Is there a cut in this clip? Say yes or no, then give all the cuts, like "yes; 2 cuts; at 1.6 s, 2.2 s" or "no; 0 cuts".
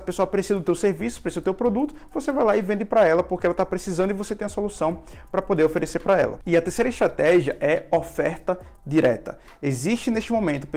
no; 0 cuts